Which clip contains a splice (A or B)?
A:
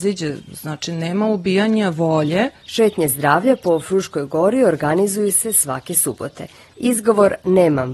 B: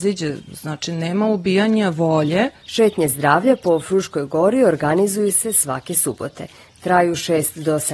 A